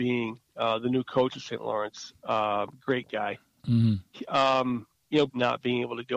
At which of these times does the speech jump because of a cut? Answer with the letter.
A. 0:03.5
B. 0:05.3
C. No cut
B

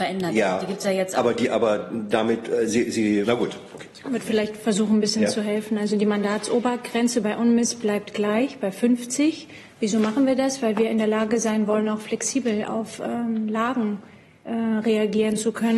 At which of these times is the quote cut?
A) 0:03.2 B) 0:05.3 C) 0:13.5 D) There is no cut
A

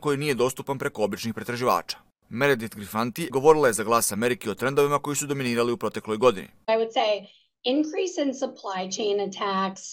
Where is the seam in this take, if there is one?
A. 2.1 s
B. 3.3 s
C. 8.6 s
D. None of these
B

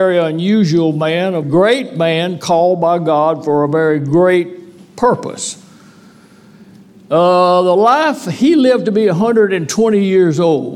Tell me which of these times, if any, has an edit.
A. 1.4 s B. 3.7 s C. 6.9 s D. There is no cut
A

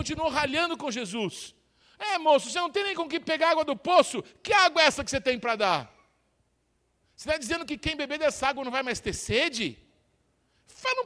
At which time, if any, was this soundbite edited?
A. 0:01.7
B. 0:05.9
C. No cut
C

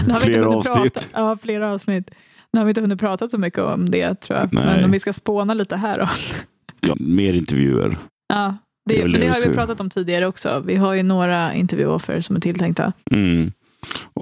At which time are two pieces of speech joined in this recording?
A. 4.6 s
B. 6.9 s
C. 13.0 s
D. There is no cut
B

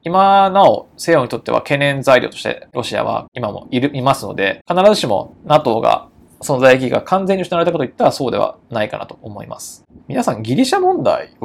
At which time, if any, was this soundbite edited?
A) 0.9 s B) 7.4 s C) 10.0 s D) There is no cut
C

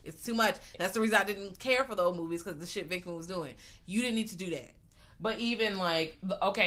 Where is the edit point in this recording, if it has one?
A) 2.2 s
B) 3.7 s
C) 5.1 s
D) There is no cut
D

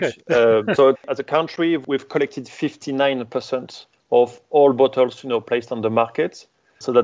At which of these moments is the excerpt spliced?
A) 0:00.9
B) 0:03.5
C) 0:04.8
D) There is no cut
A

